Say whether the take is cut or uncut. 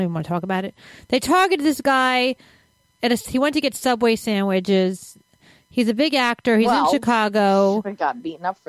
uncut